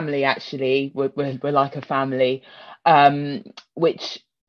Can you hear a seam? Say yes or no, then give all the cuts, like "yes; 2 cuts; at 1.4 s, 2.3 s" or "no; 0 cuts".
no; 0 cuts